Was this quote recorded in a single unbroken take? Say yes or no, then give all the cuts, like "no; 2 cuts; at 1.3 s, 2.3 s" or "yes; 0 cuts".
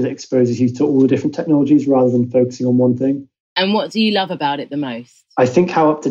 yes; 0 cuts